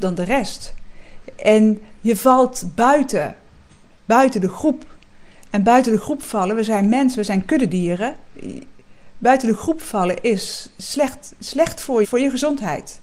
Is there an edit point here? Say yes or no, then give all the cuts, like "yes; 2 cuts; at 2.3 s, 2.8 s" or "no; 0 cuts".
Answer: yes; 1 cut; at 12.0 s